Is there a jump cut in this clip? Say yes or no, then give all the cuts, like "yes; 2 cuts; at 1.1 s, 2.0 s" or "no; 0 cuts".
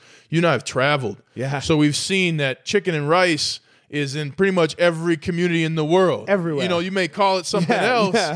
no; 0 cuts